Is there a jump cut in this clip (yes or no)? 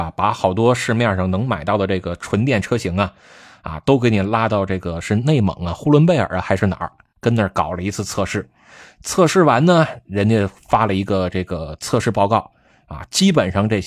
no